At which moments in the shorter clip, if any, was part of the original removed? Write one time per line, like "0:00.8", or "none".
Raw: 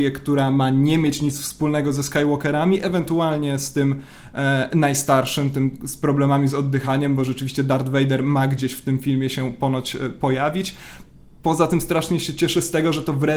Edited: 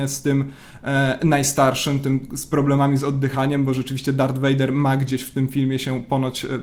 none